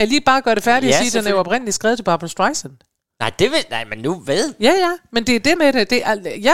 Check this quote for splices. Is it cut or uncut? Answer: cut